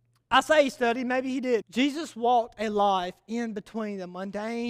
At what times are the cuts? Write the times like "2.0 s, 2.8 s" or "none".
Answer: 1.6 s